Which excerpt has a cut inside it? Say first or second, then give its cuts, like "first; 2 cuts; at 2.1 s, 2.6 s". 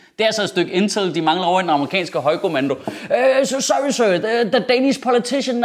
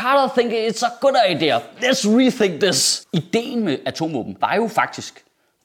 second; 1 cut; at 4.4 s